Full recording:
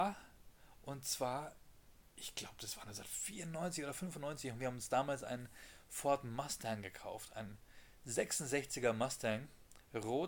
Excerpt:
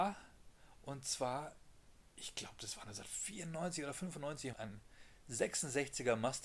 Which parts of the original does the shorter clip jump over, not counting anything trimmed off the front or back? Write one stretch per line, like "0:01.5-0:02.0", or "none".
0:04.5-0:07.3

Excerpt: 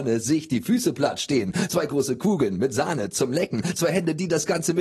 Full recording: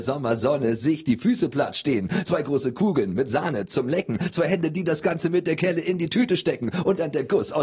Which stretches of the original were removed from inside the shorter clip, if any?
none

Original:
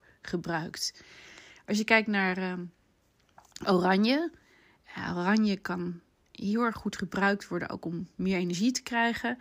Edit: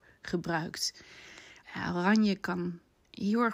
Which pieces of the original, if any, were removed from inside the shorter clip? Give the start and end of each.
0:01.6-0:04.8

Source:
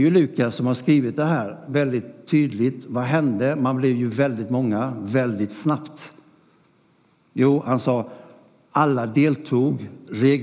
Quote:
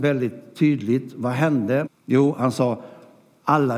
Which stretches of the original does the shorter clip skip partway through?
0:03.6-0:07.1

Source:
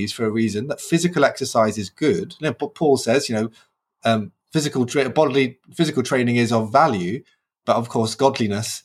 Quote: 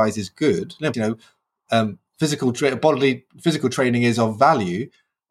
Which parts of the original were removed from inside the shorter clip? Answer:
0:02.5-0:03.3

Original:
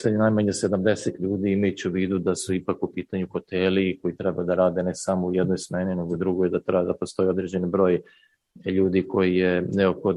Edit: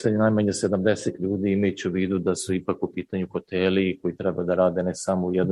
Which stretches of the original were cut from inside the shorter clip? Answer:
none

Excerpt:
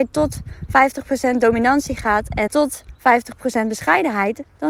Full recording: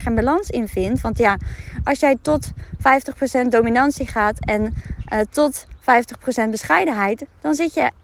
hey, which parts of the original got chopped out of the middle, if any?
0:04.6-0:05.3

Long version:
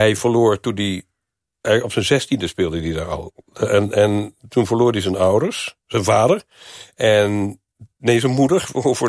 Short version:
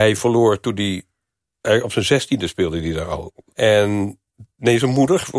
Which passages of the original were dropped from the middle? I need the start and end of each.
0:03.5-0:06.9

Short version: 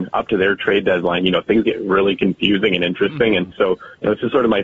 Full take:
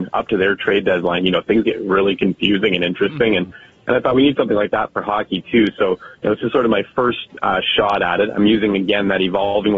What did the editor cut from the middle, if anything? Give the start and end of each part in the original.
0:03.5-0:05.7

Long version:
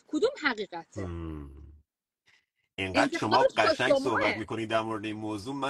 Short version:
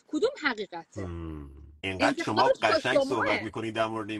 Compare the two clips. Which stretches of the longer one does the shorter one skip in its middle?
0:01.8-0:02.7

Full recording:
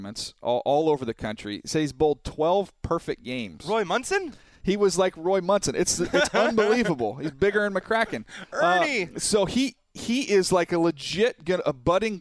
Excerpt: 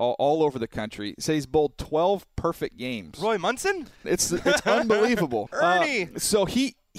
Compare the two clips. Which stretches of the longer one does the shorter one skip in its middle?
0:04.5-0:05.7
0:07.1-0:08.5

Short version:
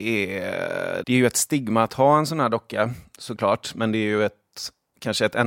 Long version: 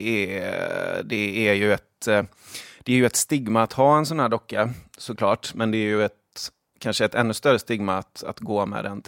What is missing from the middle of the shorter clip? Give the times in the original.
0:01.0-0:02.8

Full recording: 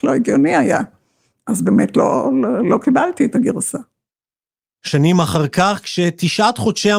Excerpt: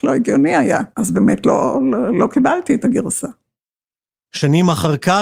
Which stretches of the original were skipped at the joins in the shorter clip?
0:00.9-0:01.4

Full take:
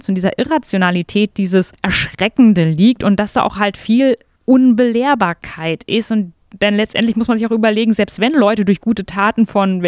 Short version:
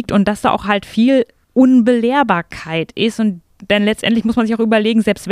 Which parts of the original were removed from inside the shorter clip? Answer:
none

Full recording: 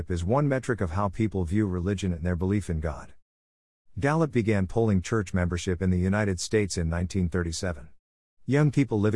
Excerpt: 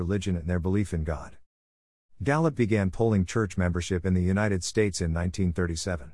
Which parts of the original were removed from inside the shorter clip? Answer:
none

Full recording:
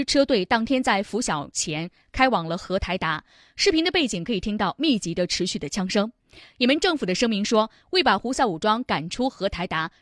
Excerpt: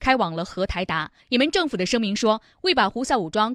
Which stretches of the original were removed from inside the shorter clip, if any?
0:03.3-0:06.5

